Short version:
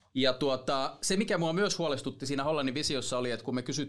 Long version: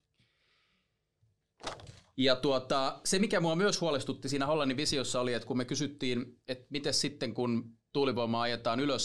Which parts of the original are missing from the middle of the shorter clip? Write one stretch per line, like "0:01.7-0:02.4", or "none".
none